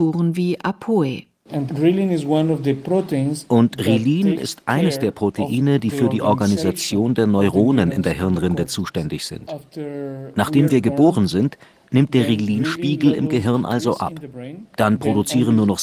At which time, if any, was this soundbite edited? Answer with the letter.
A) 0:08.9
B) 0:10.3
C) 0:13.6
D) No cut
D